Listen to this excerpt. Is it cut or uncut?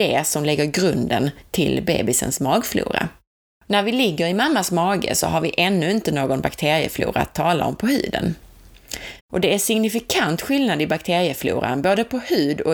cut